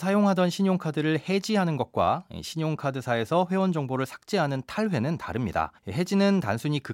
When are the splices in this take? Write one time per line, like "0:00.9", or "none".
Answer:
0:05.8

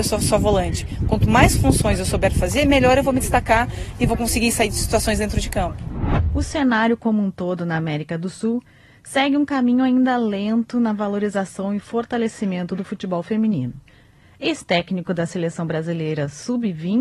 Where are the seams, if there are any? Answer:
none

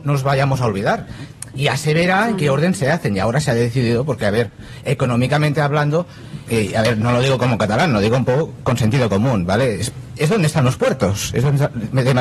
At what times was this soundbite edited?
0:06.5

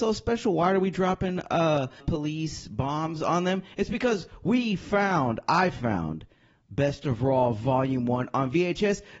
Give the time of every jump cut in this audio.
0:02.0

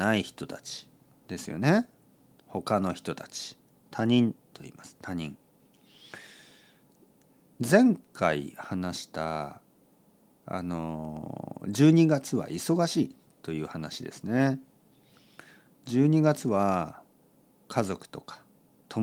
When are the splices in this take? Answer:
none

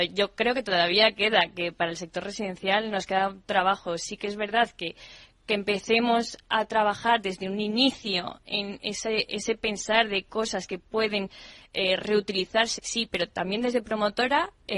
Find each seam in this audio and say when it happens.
0:12.8

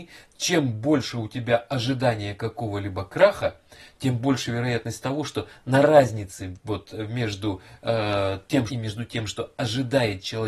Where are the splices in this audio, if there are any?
0:08.7

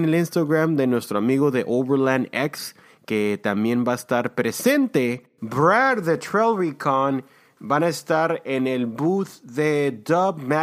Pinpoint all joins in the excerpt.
none

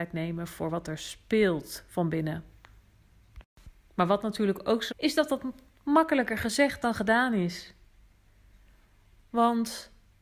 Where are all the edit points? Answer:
0:04.9

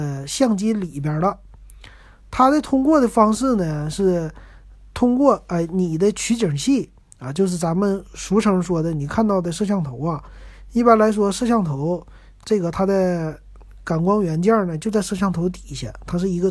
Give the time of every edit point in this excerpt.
none

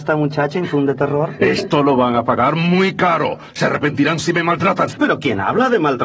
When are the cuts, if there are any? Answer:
none

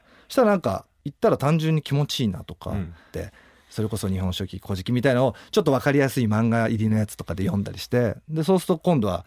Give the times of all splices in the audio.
0:03.1

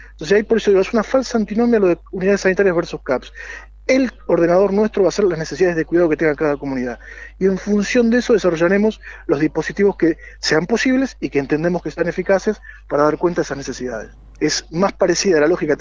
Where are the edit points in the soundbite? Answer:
0:14.4

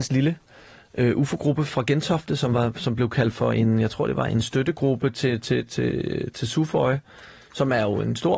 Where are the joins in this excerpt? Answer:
none

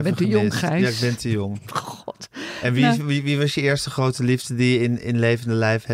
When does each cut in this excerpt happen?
none

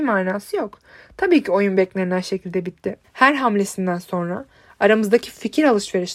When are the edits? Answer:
0:03.0

